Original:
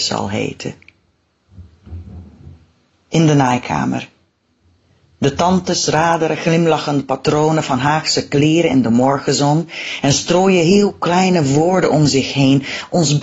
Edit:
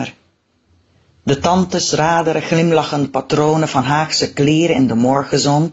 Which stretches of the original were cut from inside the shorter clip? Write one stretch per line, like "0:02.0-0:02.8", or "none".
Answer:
none